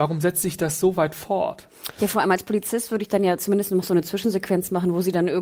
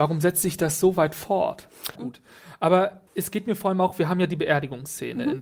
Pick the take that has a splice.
second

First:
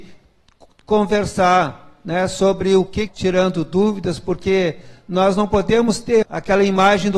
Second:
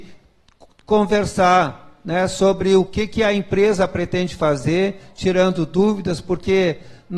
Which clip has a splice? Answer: first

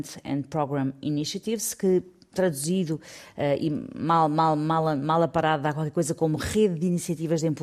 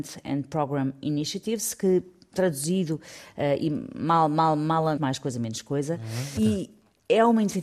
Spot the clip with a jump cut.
second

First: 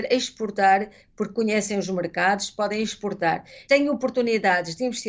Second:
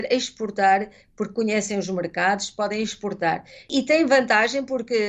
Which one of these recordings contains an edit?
first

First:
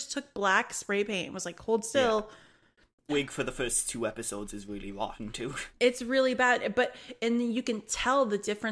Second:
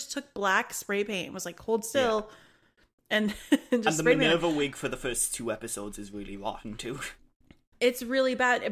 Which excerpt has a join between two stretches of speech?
first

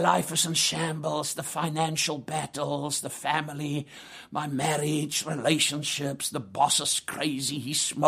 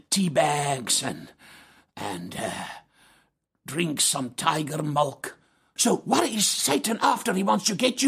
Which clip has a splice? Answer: second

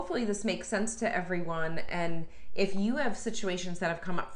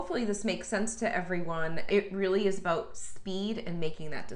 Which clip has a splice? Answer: second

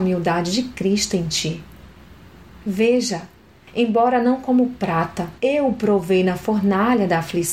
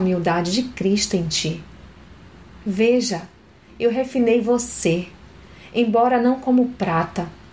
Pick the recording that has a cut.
first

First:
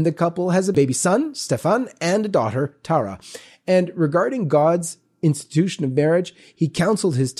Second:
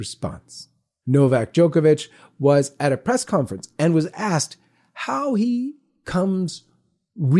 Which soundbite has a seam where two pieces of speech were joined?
second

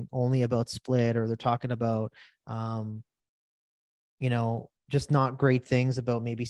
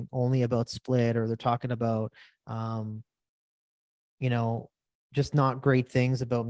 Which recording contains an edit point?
first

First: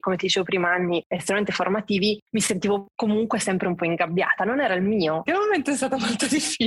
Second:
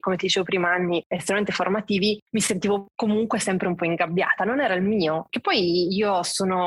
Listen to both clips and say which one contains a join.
first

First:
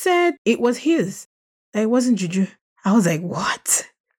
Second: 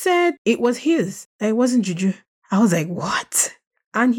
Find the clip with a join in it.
second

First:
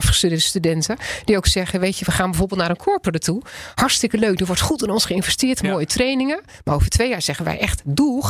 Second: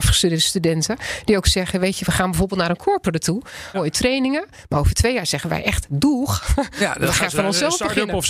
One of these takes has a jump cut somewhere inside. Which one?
second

